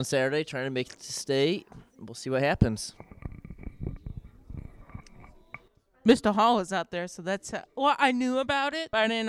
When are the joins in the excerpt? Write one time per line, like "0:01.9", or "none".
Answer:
none